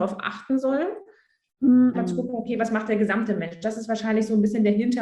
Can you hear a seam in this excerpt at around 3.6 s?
no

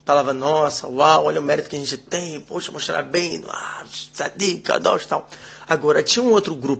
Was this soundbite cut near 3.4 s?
no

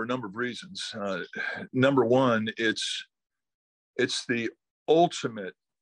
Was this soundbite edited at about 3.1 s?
no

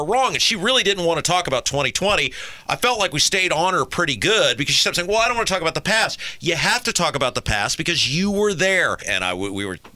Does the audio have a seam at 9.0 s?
yes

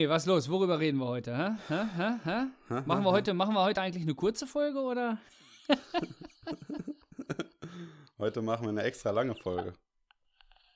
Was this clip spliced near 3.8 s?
no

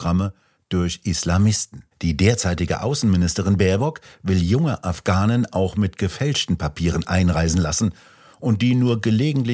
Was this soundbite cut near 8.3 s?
no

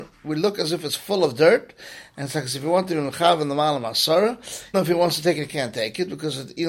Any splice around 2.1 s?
no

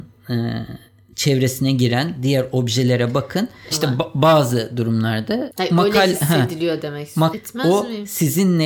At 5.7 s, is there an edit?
no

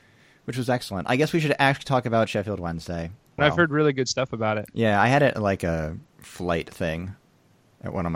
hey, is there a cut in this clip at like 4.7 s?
no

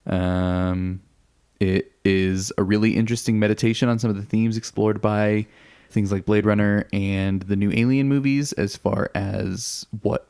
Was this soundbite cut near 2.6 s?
no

